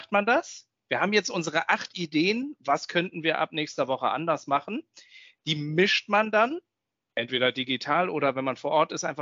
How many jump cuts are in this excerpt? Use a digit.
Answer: 0